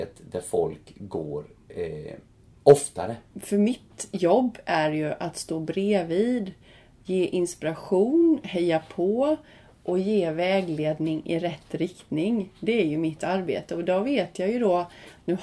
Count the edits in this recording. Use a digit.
1